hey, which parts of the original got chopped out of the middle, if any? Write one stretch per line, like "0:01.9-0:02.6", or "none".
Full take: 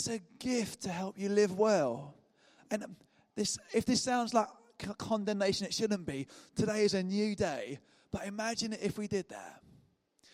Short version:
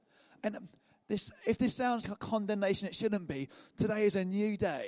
0:04.3-0:04.8